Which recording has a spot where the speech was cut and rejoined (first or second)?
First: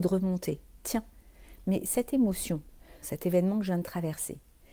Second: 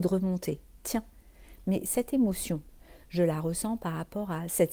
first